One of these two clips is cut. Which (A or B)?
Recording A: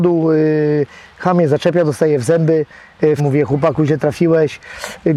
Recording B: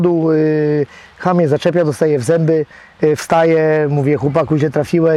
A